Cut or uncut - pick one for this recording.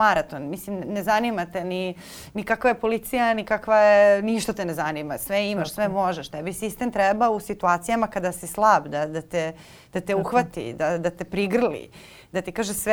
uncut